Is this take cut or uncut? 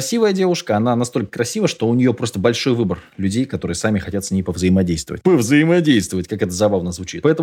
uncut